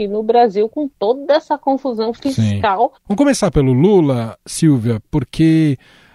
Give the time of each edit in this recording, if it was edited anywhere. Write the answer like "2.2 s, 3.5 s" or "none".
3.0 s